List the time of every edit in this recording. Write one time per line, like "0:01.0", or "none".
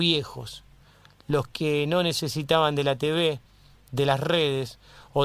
none

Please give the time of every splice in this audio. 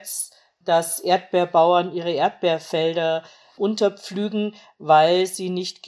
none

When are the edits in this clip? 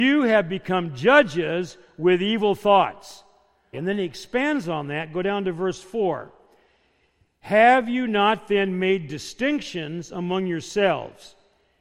0:03.7

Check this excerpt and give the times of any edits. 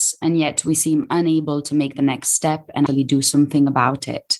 0:02.9

